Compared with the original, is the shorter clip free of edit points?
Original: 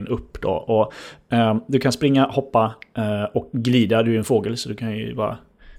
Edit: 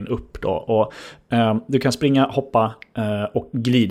yes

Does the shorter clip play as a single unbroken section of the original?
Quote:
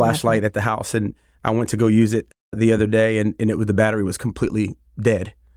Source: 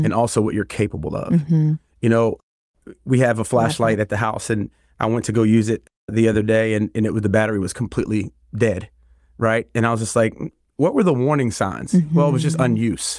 yes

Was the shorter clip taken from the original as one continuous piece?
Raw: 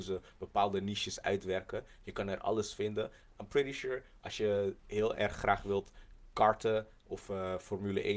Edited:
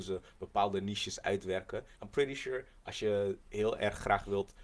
no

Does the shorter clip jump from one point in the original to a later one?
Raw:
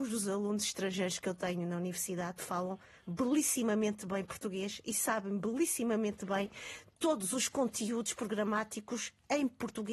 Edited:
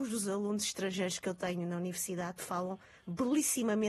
no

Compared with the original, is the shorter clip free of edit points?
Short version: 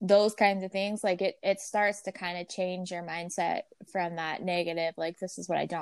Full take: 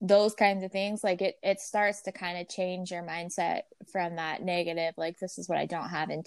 yes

